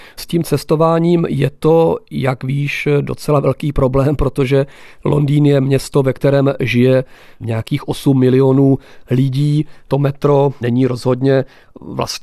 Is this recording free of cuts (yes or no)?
yes